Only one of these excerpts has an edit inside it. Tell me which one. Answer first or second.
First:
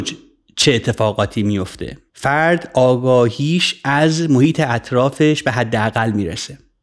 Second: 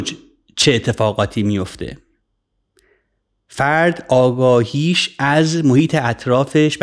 first